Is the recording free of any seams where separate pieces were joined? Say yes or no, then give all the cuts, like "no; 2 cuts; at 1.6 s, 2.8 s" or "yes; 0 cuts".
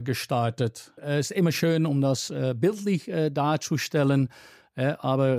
no; 1 cut; at 1.0 s